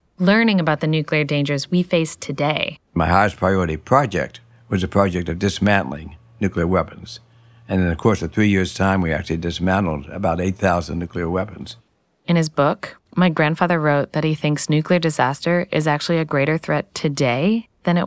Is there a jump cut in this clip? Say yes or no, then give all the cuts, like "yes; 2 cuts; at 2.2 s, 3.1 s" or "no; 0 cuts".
yes; 1 cut; at 2.9 s